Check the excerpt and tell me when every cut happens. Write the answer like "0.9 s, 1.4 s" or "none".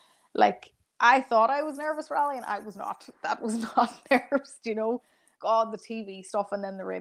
5.4 s